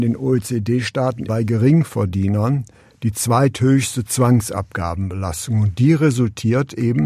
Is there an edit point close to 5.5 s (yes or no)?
no